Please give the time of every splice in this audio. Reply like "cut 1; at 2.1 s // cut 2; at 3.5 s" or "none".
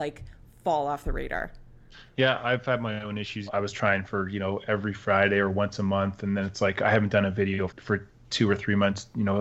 cut 1; at 3.5 s // cut 2; at 7.7 s